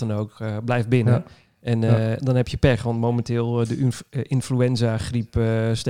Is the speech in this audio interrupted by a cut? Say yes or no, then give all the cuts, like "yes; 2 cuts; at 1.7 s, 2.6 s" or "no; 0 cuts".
no; 0 cuts